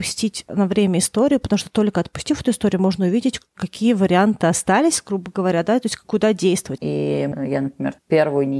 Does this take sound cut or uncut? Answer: cut